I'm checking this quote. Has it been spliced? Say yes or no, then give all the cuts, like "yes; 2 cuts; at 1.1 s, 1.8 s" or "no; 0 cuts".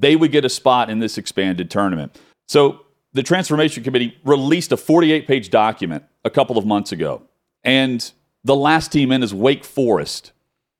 yes; 2 cuts; at 2.3 s, 7.6 s